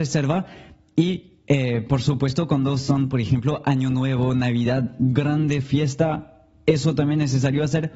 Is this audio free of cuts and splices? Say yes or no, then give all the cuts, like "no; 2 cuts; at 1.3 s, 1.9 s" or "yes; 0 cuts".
yes; 0 cuts